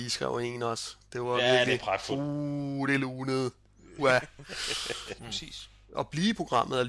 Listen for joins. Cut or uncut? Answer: cut